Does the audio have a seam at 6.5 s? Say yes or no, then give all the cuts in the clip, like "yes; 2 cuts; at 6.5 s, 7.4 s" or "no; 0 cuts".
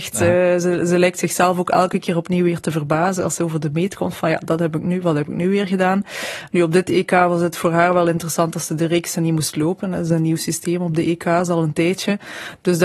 yes; 1 cut; at 6.5 s